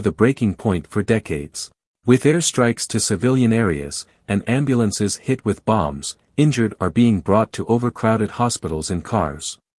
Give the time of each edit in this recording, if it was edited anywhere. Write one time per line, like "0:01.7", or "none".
0:01.9